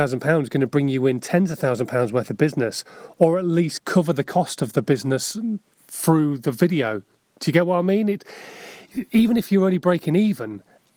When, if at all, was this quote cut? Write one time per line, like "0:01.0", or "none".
none